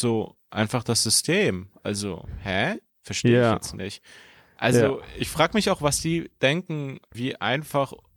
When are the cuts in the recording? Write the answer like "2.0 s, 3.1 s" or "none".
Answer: 7.1 s